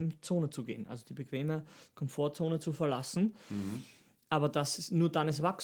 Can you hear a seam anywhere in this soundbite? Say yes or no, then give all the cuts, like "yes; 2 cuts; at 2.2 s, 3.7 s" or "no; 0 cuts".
no; 0 cuts